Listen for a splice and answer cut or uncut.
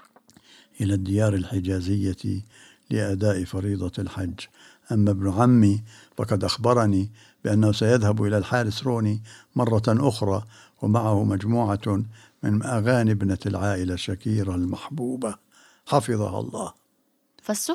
uncut